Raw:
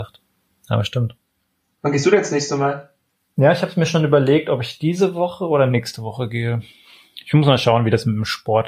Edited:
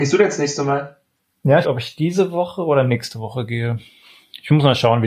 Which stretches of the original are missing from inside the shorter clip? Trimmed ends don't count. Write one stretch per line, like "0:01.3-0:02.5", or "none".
0:03.5-0:04.4